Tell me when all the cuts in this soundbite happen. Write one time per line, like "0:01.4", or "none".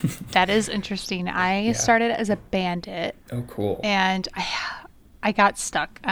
0:03.2